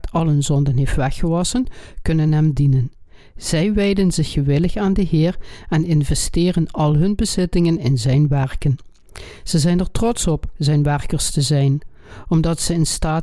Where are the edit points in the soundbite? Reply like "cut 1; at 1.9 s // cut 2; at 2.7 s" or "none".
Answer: none